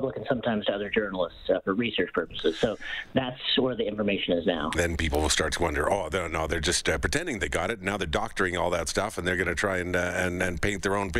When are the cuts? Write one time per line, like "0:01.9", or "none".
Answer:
0:04.7